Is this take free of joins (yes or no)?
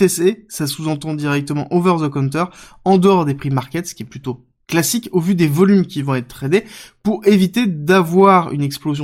yes